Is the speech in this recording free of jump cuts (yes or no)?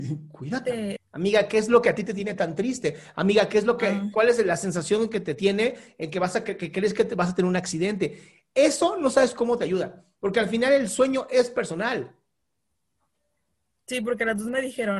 no